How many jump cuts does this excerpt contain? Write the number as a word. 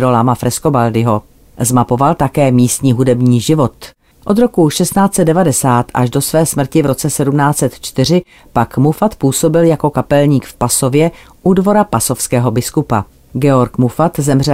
one